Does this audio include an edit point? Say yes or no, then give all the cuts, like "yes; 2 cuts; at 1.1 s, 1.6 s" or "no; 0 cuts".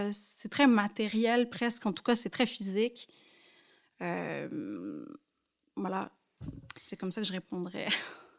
no; 0 cuts